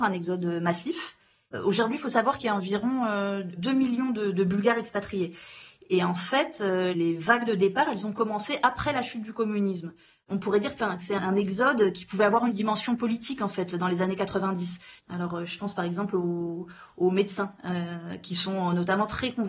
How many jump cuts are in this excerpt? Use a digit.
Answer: 1